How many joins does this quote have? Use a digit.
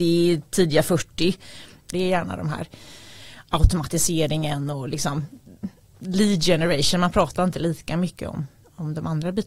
1